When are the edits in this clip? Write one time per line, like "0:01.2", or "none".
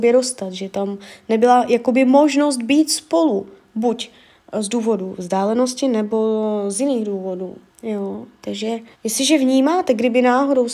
0:07.7
0:08.9